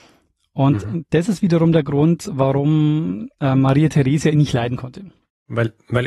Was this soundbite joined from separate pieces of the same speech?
no; 0 cuts

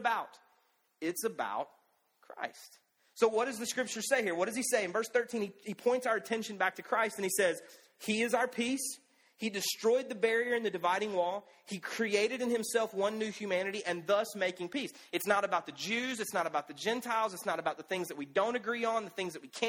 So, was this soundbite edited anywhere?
no; 0 cuts

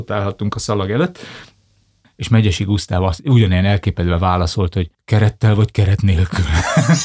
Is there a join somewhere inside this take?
yes; 2 cuts; at 2.0 s, 4.9 s

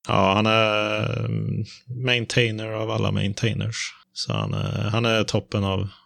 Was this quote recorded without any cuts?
yes; 0 cuts

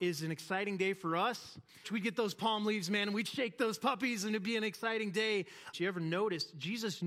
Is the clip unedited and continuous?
no; 2 cuts; at 1.8 s, 5.7 s

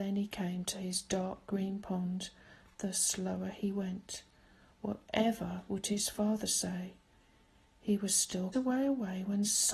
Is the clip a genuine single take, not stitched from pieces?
no; 1 cut; at 8.5 s

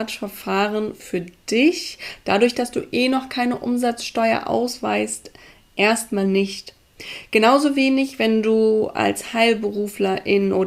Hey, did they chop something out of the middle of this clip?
no; 0 cuts

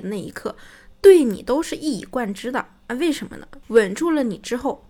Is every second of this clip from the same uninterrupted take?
no; 1 cut; at 3.6 s

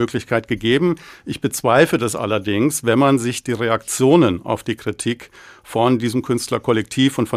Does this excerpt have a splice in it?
no; 0 cuts

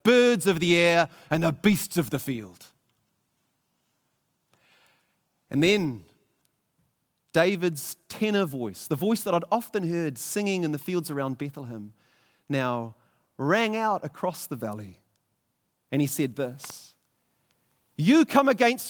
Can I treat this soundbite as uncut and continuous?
yes; 0 cuts

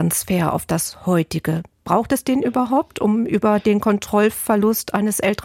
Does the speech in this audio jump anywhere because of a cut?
no; 0 cuts

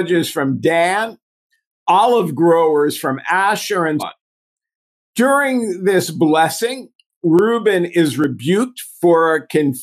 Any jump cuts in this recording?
yes; 1 cut; at 4.0 s

